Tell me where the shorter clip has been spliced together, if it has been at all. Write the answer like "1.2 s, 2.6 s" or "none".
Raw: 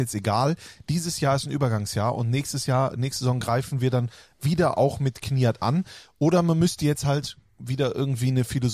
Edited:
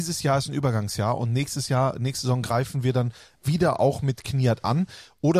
none